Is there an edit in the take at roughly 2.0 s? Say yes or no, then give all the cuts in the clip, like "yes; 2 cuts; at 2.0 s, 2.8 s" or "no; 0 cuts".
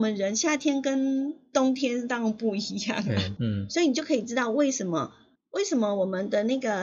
no; 2 cuts; at 3.4 s, 5.4 s